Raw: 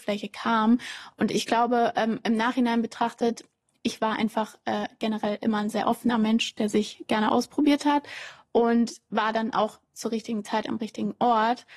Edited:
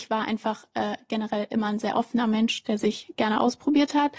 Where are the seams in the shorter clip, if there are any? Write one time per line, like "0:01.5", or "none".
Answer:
none